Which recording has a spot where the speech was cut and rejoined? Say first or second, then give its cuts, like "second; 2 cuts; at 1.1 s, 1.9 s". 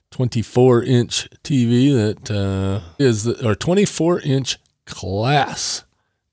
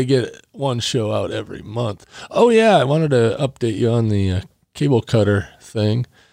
first; 1 cut; at 3.0 s